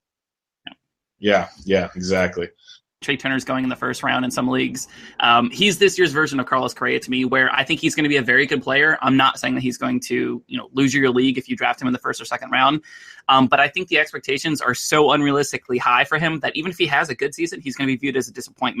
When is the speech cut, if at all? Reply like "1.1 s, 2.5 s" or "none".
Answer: 3.0 s